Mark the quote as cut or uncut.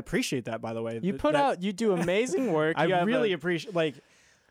uncut